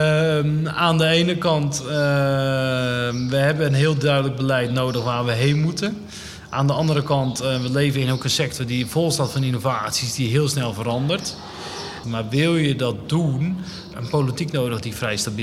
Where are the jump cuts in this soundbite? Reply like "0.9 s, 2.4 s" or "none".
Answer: 12.0 s, 13.9 s

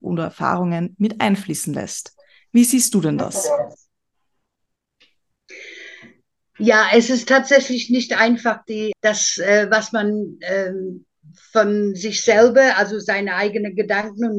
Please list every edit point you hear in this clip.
8.9 s

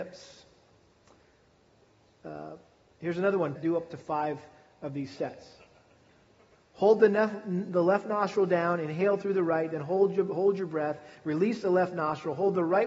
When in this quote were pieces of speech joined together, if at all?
3.6 s, 6.5 s

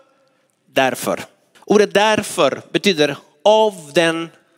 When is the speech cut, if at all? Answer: 1.5 s

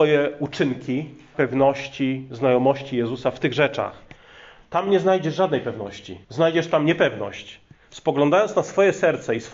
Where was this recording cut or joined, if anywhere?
1.3 s, 6.2 s

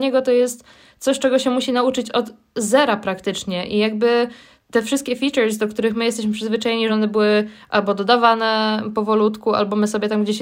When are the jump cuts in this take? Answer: none

